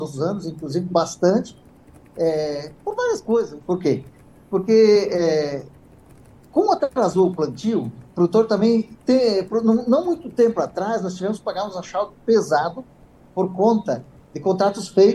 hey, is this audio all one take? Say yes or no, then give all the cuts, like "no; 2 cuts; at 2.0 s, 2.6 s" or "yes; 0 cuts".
no; 1 cut; at 3.6 s